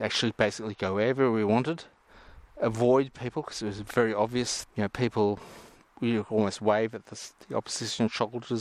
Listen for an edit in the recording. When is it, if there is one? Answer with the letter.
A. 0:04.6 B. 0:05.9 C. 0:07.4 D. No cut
A